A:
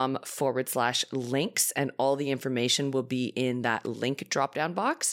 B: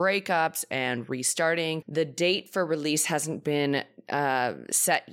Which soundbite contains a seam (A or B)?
B